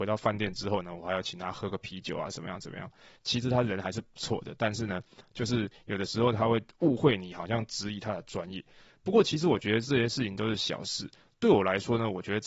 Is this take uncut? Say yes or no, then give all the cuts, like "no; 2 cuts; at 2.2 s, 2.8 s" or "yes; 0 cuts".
yes; 0 cuts